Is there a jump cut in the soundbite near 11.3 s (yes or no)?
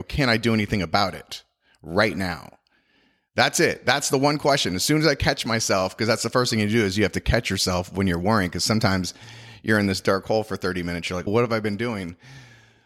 yes